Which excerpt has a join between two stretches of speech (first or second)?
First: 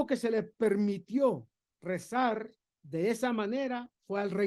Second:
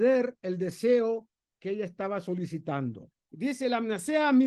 second